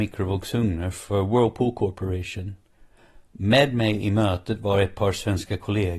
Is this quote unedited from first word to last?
yes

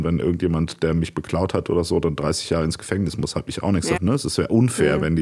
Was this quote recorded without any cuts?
no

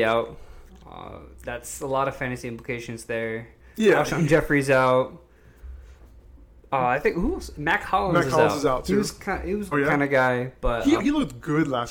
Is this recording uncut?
no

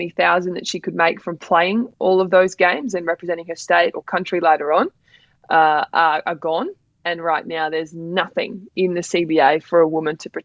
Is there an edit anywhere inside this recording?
no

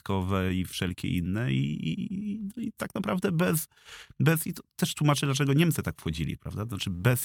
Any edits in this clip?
no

